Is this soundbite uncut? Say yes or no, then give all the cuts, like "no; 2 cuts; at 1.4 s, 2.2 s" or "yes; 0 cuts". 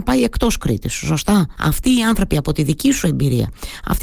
no; 1 cut; at 1.6 s